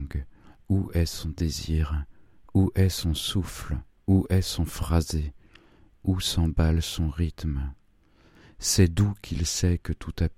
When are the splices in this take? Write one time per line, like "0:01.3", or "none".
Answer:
none